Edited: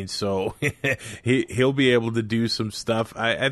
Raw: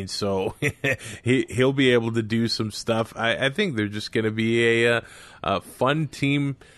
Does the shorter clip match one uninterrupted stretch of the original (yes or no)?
yes